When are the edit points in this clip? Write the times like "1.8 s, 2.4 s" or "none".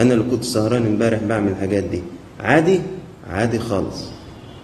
none